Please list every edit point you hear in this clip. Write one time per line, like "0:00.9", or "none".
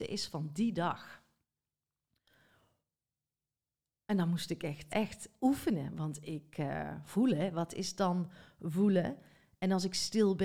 0:04.9